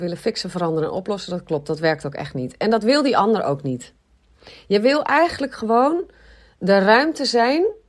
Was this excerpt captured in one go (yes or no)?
yes